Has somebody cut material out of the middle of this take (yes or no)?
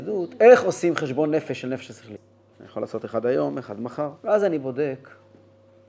yes